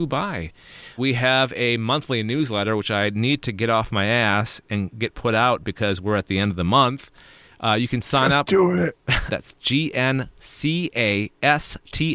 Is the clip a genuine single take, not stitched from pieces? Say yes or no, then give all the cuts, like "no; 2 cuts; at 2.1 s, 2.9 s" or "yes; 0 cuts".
no; 2 cuts; at 1.0 s, 9.3 s